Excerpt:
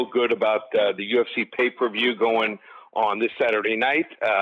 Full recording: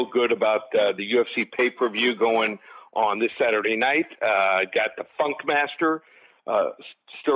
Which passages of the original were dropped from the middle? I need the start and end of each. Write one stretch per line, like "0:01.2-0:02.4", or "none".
none